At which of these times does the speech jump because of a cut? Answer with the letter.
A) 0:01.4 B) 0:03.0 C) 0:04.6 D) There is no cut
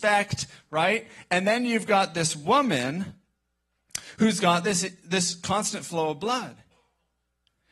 D